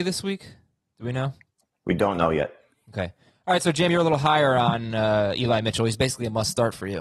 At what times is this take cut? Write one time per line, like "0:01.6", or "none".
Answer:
none